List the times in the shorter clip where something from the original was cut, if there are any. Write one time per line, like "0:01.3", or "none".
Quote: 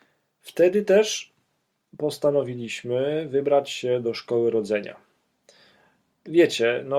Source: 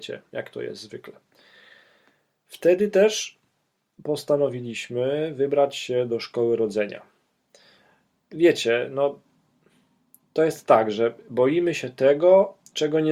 none